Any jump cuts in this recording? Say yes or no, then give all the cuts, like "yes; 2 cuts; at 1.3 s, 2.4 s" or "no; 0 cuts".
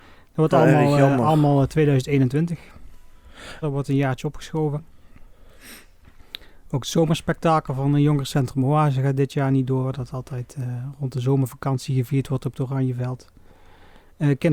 yes; 1 cut; at 3.6 s